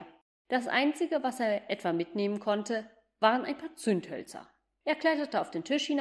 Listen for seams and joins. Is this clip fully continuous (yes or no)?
yes